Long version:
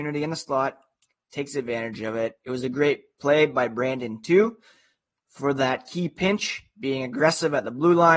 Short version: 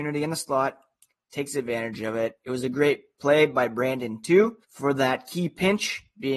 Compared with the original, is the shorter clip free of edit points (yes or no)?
no